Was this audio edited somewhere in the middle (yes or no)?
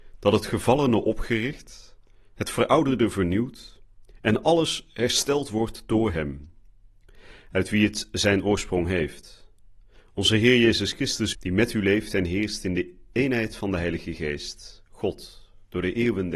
yes